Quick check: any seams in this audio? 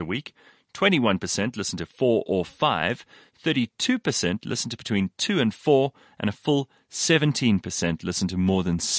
no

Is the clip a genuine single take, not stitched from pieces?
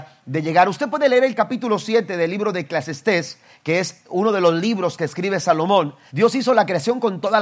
no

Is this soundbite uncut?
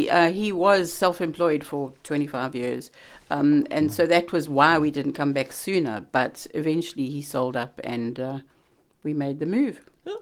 yes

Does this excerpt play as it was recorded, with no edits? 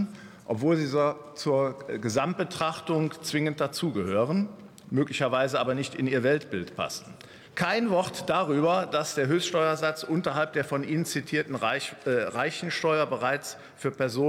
no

